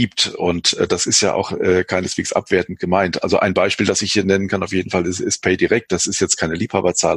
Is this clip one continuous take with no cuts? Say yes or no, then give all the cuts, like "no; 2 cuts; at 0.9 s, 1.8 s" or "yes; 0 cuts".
yes; 0 cuts